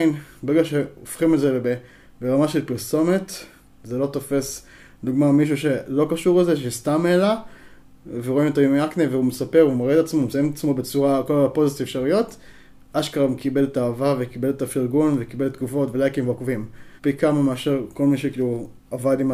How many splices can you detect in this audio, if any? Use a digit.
1